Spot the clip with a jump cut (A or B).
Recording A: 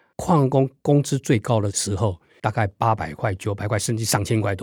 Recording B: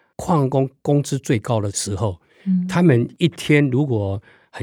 A